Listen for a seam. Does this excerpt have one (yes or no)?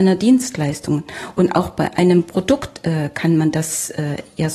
no